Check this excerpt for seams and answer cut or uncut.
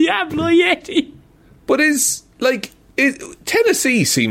uncut